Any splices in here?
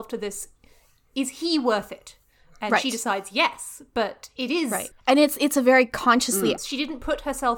yes; 2 cuts; at 4.9 s, 6.6 s

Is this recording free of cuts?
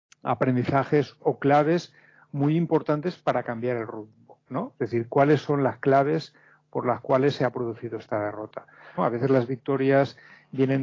no; 2 cuts; at 4.7 s, 9.0 s

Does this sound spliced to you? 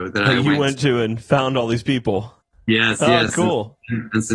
no; 0 cuts

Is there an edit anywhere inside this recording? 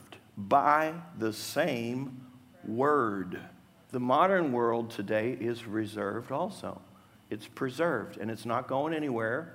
yes; 1 cut; at 3.9 s

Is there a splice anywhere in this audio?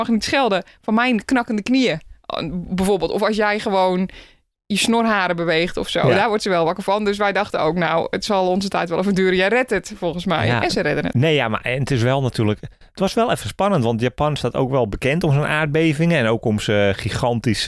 no; 0 cuts

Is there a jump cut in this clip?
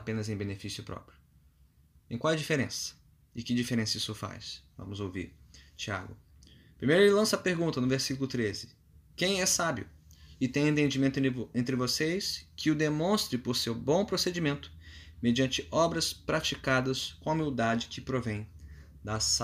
no; 0 cuts

